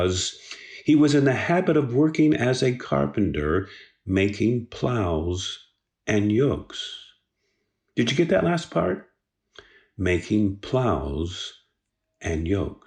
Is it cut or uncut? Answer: uncut